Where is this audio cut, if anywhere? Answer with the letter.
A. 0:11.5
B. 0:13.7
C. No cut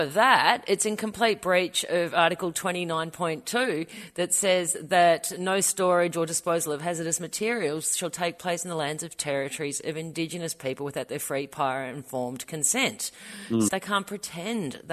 B